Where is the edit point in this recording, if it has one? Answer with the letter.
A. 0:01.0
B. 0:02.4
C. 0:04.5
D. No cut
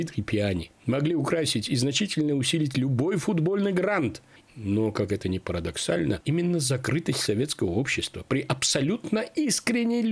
C